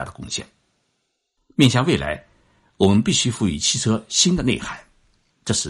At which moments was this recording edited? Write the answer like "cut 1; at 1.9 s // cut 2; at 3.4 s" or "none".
cut 1; at 1.4 s